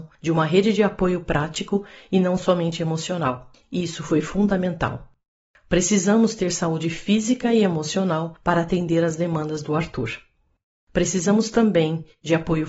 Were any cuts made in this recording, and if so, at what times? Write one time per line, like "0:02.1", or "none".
none

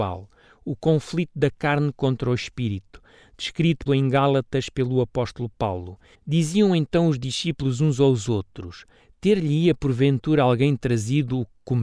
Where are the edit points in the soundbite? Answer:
0:03.9
0:06.1

